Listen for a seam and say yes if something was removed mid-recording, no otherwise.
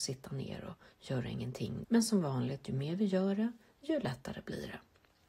yes